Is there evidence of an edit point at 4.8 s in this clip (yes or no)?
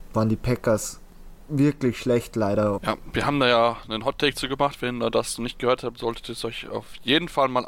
no